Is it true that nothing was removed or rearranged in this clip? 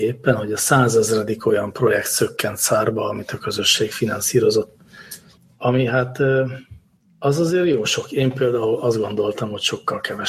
yes; 0 cuts

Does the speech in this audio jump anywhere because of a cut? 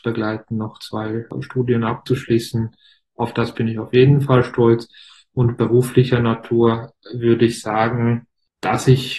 no; 0 cuts

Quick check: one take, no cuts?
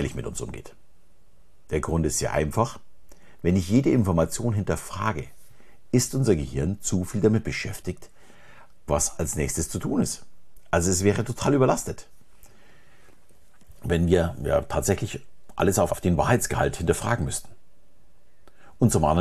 no; 2 cuts; at 8.9 s, 15.9 s

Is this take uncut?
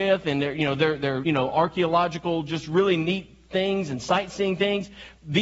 no; 1 cut; at 1.2 s

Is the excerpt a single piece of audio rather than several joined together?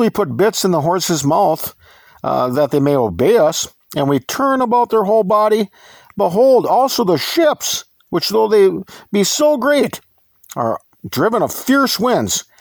yes; 0 cuts

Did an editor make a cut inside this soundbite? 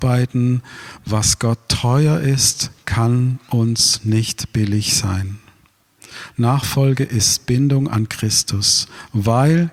no; 0 cuts

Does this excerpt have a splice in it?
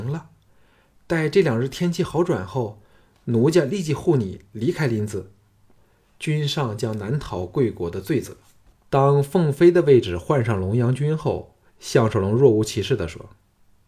yes; 3 cuts; at 5.8 s, 8.7 s, 11.7 s

